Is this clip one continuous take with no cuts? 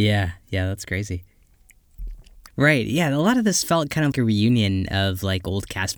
no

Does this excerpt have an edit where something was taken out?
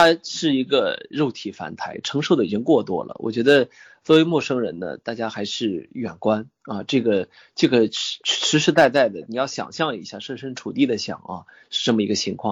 no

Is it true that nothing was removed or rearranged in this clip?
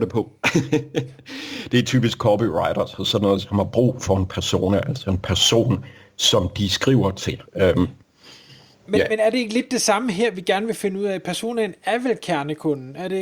no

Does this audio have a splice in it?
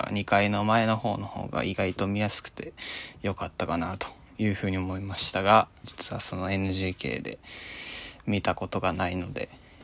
yes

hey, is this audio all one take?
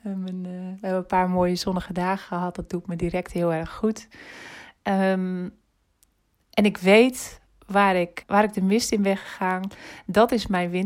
no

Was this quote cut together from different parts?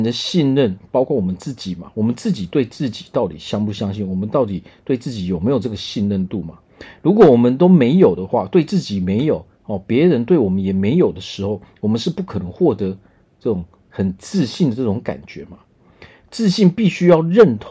no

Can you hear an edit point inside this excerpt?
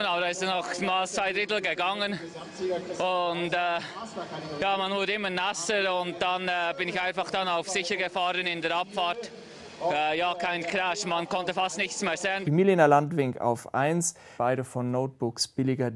yes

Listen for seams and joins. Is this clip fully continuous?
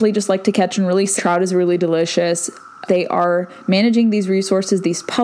no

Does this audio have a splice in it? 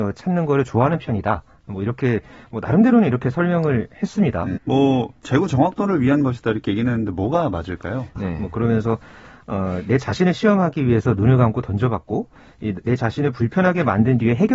yes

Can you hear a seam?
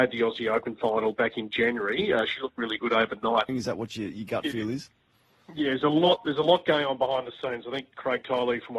yes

